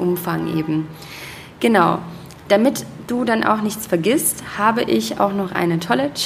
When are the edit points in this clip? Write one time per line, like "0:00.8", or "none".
none